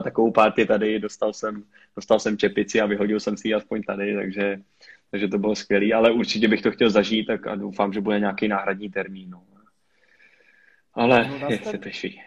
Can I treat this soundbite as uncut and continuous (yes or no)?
yes